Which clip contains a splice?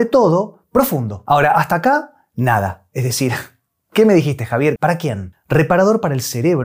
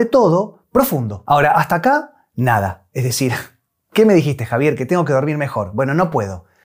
first; 1 cut; at 4.8 s

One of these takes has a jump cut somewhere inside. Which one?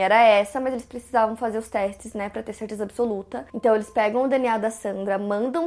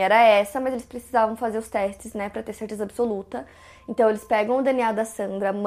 first; 1 cut; at 3.5 s

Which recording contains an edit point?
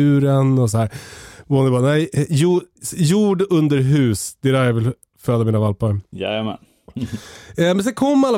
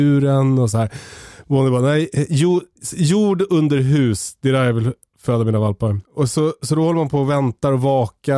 second; 1 cut; at 6.0 s

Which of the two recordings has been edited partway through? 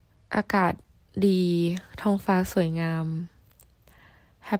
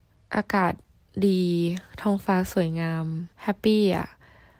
second; 1 cut; at 3.3 s

